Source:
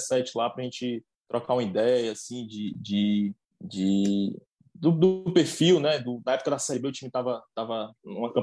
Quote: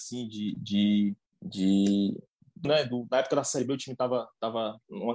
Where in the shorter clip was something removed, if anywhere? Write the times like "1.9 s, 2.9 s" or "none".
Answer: 2.6 s